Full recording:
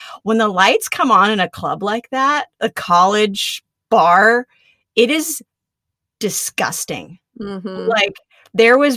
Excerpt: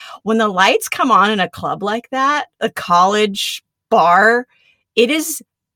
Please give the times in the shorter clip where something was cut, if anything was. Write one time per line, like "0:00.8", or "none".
none